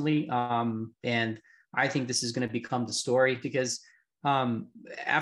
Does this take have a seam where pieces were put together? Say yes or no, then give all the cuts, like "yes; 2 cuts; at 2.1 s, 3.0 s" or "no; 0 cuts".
yes; 1 cut; at 3.4 s